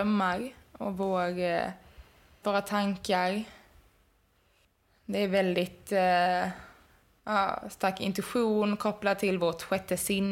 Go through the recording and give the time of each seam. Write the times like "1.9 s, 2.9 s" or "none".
2.4 s